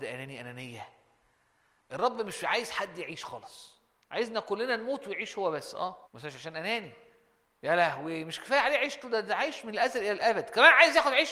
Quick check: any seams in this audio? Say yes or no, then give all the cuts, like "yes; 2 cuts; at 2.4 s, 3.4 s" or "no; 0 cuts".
yes; 1 cut; at 6.0 s